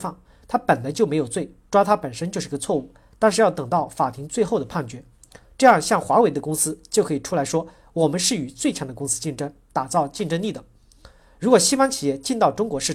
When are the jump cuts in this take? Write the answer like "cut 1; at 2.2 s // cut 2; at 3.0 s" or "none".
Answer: cut 1; at 5.4 s // cut 2; at 11.2 s